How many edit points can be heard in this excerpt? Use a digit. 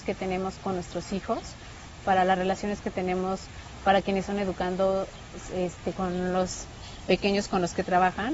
1